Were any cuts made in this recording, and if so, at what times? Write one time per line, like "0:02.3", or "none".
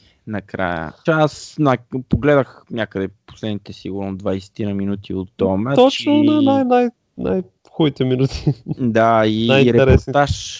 0:01.1